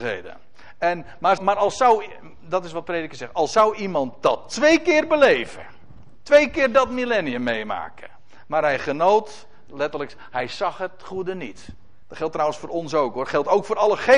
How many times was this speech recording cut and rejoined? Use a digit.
2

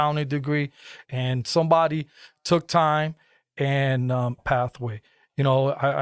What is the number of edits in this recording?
2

